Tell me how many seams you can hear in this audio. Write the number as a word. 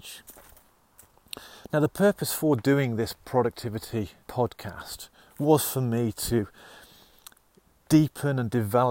one